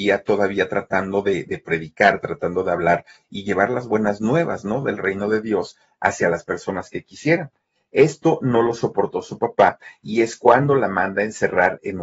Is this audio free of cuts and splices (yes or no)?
yes